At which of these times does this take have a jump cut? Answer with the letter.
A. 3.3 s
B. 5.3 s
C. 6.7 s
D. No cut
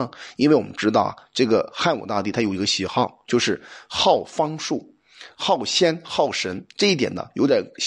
D